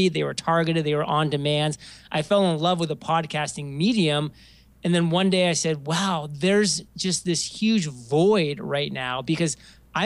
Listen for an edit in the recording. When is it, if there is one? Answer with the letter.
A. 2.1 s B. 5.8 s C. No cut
C